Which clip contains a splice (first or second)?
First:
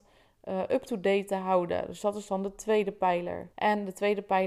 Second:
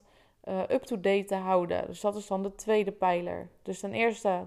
first